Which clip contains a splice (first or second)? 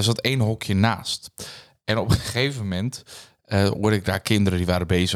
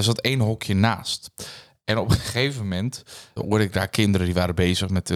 second